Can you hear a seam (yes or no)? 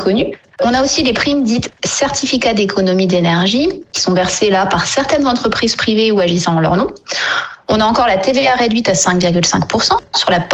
yes